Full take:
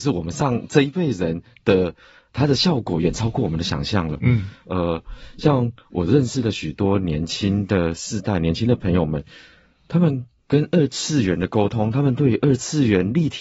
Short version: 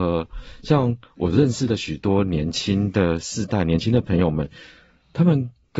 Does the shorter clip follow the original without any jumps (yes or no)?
yes